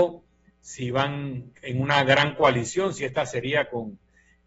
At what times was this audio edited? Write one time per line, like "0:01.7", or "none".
0:01.5

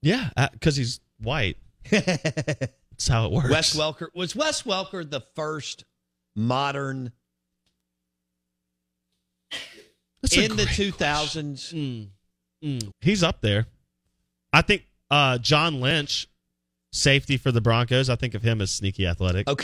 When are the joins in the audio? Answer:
0:12.9

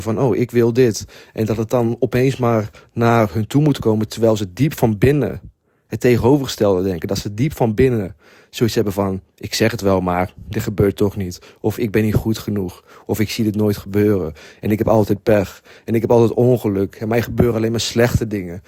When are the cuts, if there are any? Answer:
none

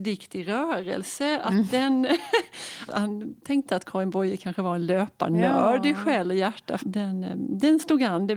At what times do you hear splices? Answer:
0:02.9
0:06.8

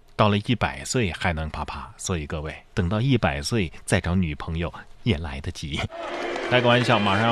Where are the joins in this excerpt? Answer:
0:01.5
0:02.7

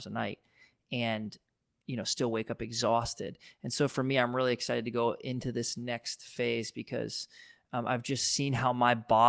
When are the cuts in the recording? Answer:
none

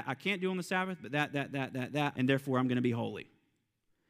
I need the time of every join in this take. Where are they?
0:02.1

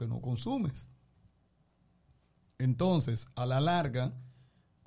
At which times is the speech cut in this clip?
none

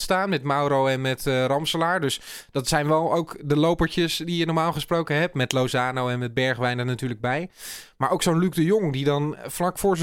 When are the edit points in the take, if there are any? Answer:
none

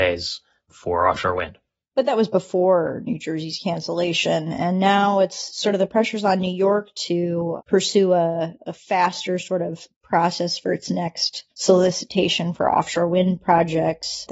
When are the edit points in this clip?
0:01.9
0:11.5

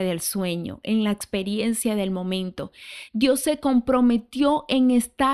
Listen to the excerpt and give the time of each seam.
0:03.1

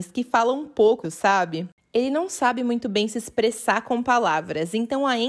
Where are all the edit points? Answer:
0:01.0

